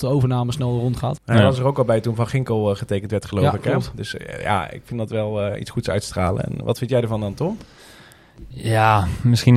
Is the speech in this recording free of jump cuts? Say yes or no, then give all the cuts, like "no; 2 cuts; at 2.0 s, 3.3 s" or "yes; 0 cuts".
no; 1 cut; at 1.2 s